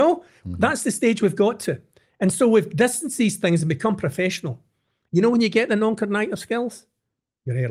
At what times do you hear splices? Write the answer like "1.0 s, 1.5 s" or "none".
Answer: 5.1 s